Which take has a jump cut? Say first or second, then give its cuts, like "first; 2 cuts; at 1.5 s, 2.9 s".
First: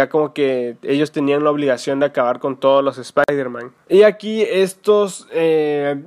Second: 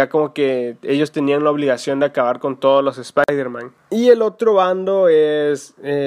first; 1 cut; at 3.8 s